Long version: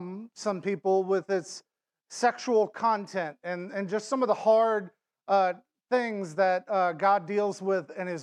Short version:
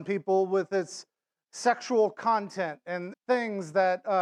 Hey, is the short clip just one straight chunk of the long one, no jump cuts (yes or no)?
no